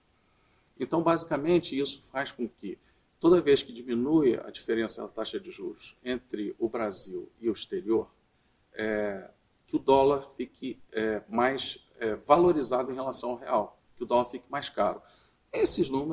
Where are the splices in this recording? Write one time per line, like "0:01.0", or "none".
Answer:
0:13.8